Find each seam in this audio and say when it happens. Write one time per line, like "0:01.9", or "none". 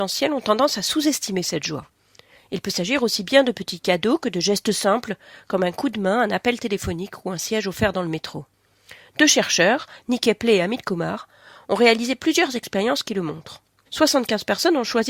0:13.9